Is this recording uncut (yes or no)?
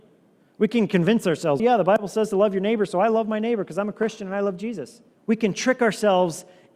no